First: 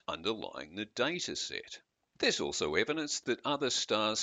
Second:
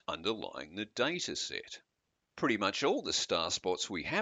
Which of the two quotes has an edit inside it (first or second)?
first